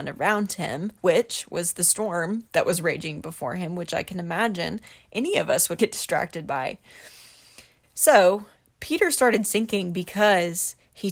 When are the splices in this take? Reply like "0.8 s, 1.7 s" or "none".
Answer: 5.8 s, 7.8 s